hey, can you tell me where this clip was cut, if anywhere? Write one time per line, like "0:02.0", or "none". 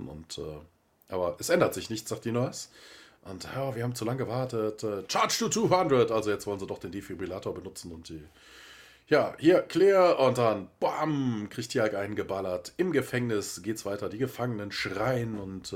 none